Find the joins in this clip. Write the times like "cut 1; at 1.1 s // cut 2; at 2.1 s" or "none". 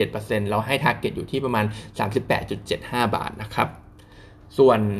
none

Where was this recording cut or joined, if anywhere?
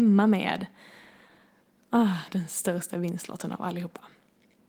cut 1; at 2.3 s

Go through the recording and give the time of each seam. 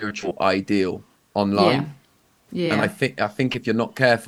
none

